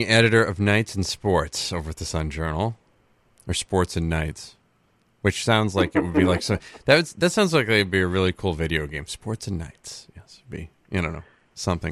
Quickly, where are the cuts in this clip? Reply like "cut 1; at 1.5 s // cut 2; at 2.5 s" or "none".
none